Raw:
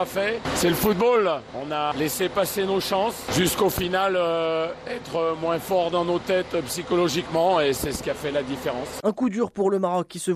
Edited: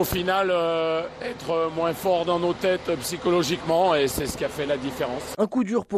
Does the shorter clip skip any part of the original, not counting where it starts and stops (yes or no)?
no